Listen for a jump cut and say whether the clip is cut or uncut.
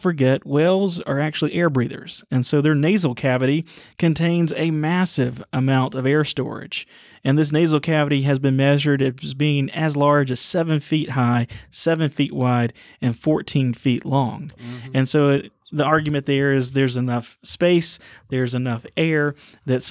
uncut